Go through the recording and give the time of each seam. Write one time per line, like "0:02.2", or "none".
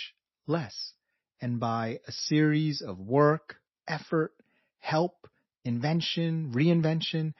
0:03.7